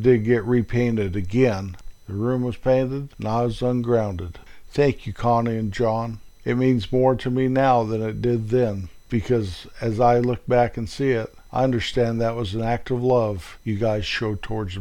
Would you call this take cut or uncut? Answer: cut